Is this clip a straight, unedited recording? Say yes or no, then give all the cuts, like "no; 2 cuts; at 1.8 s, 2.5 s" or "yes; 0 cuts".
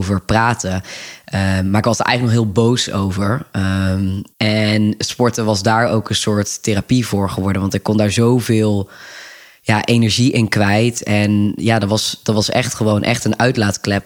no; 1 cut; at 4.3 s